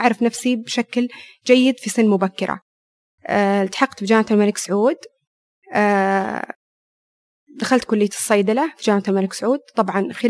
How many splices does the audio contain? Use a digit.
0